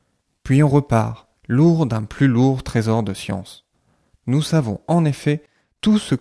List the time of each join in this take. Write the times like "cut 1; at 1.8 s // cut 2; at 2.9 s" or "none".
cut 1; at 1.3 s